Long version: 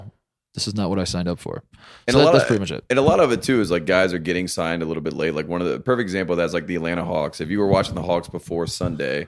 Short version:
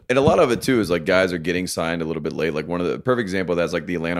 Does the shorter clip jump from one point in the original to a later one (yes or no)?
no